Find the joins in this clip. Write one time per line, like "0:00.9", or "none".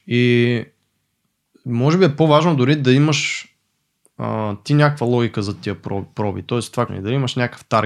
0:06.9